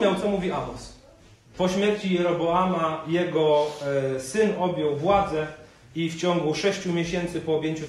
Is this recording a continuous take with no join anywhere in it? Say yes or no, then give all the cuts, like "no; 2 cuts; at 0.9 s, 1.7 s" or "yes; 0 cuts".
no; 1 cut; at 1.5 s